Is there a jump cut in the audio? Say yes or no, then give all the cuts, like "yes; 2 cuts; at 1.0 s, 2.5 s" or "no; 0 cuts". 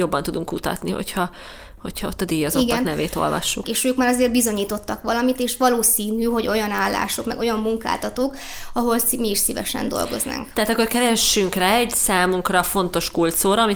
yes; 1 cut; at 3.6 s